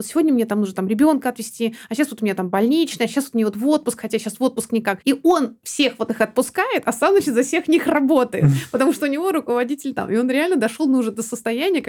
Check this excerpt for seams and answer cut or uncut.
uncut